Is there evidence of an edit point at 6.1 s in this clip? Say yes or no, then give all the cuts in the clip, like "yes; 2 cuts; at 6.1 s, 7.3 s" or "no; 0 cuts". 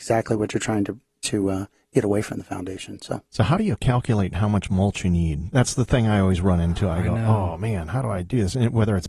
no; 1 cut; at 3.3 s